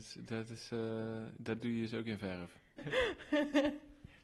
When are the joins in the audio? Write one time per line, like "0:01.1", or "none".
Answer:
0:02.8